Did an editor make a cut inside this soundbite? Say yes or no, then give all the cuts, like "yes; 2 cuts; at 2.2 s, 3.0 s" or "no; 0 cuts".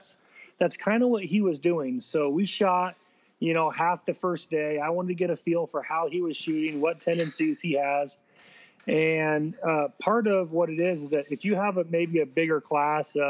no; 0 cuts